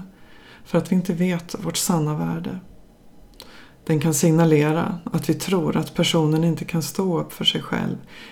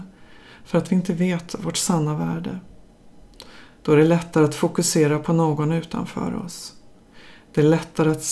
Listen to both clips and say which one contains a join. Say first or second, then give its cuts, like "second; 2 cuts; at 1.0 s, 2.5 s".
first; 1 cut; at 3.7 s